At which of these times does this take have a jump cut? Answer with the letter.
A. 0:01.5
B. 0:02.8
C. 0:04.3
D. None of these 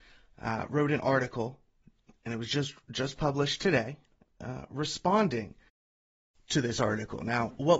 D